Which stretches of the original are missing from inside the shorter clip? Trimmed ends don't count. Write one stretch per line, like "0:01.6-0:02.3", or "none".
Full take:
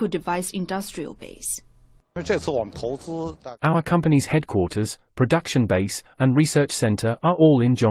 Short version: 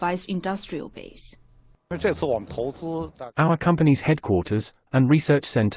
0:05.1-0:06.1